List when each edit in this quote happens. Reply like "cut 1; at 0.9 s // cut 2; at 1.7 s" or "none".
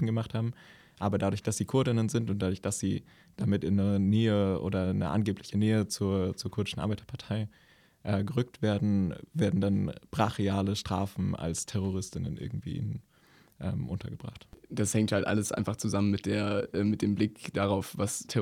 none